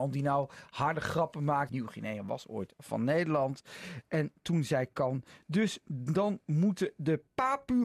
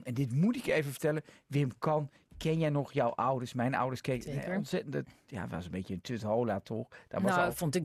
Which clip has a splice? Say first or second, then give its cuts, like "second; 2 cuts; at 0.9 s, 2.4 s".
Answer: first; 1 cut; at 1.7 s